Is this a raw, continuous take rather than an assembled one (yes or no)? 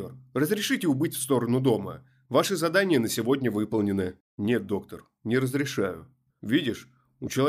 no